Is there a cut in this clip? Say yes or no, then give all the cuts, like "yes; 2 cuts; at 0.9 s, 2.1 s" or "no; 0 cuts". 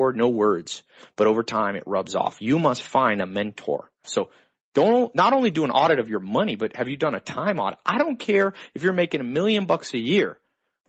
yes; 1 cut; at 4.0 s